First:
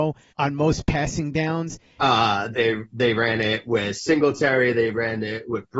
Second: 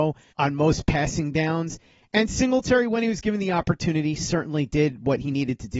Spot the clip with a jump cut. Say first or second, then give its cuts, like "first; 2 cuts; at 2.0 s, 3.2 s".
first; 1 cut; at 2.0 s